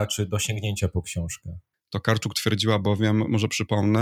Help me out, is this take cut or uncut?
cut